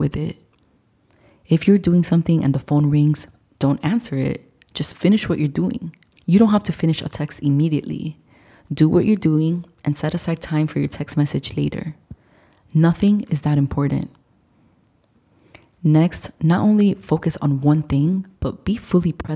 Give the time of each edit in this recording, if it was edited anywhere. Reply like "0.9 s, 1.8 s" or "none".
6.1 s